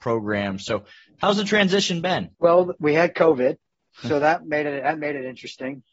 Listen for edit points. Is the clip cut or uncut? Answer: cut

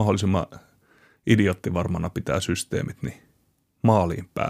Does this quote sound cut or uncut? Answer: uncut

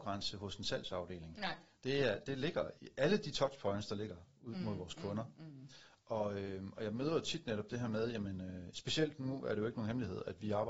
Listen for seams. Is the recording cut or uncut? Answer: cut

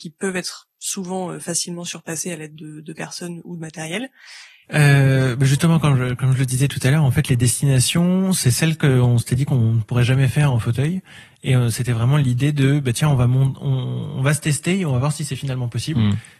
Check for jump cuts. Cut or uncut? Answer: cut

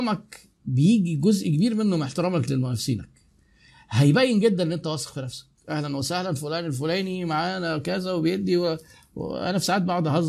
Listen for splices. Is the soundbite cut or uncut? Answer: uncut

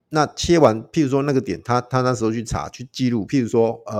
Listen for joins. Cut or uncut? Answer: uncut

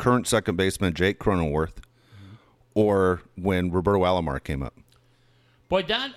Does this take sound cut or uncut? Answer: uncut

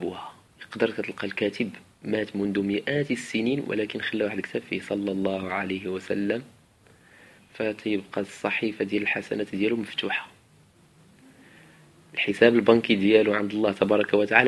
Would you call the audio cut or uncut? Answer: uncut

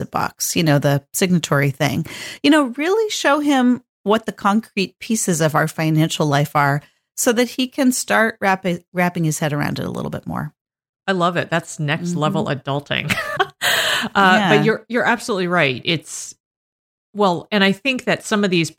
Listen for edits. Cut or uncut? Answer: cut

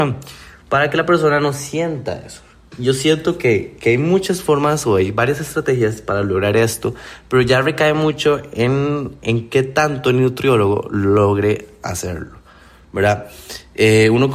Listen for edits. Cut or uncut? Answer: uncut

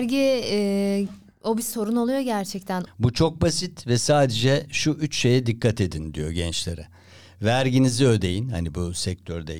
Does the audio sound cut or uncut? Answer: cut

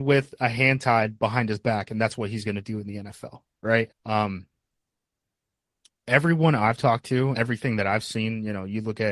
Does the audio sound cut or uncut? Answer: cut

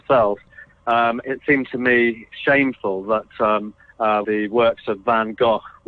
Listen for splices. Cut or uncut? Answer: cut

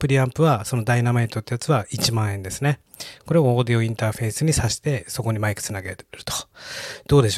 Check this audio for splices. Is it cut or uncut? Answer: uncut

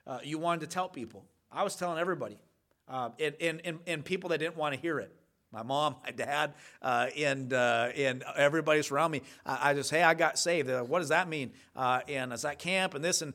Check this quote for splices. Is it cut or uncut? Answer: uncut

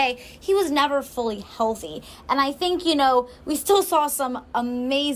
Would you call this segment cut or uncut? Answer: uncut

